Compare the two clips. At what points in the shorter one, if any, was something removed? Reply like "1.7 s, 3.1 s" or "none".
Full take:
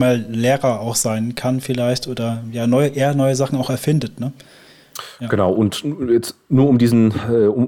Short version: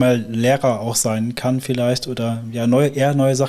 none